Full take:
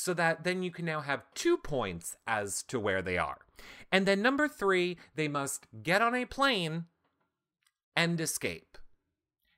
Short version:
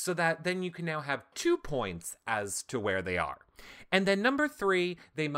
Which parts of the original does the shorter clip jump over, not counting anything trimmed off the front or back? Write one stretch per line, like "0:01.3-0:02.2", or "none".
none